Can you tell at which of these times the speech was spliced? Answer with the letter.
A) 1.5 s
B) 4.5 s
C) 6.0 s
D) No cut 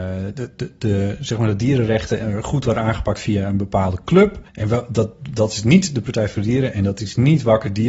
B